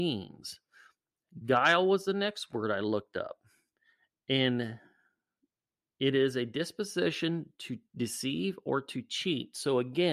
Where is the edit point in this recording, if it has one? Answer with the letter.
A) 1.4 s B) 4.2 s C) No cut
C